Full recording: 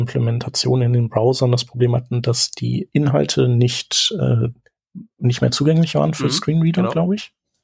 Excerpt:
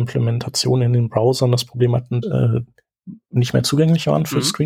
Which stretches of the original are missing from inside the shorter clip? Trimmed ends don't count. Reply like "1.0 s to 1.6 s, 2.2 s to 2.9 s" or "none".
2.2 s to 4.1 s